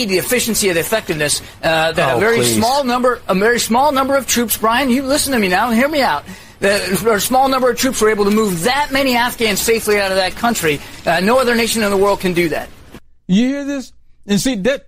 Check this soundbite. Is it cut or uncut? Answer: uncut